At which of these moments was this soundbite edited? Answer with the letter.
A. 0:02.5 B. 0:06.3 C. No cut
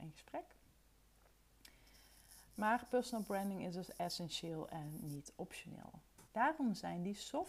B